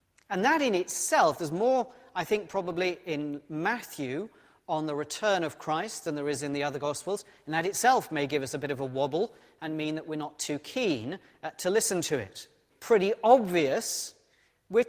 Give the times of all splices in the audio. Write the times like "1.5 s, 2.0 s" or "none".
12.7 s